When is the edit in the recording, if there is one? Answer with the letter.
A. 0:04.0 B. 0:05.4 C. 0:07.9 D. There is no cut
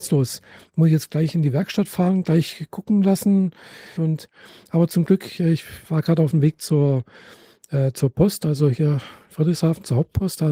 A